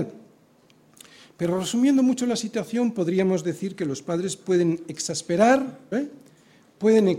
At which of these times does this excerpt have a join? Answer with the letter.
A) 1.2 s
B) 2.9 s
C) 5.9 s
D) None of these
C